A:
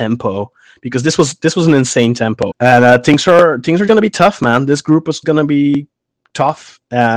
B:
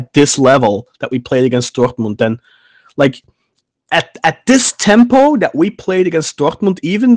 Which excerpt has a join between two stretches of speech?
A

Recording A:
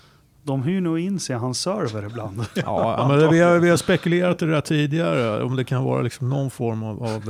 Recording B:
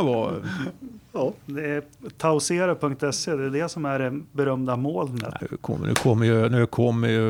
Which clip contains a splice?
B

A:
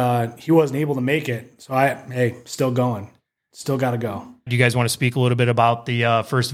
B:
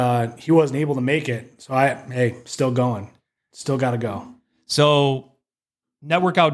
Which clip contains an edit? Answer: A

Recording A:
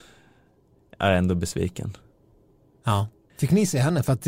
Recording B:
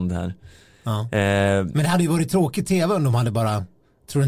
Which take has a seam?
A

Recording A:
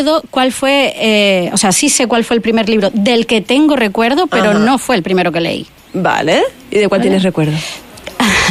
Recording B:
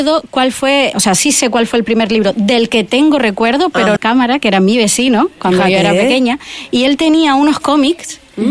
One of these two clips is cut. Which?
B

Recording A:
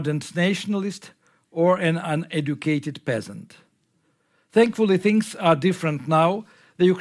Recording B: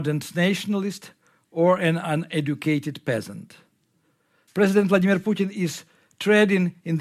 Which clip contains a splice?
B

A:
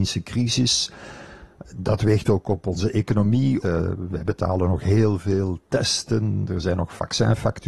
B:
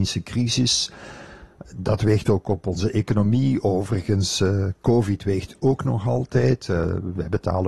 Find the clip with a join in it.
A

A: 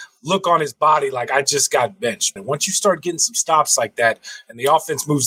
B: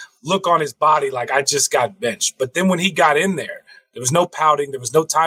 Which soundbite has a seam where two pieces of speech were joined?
A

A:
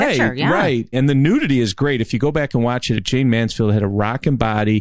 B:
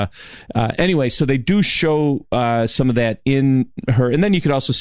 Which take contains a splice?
A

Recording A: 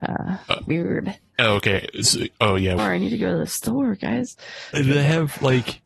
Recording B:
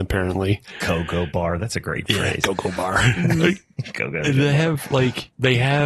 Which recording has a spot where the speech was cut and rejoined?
A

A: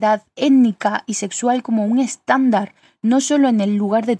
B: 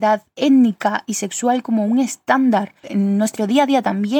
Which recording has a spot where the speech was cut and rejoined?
B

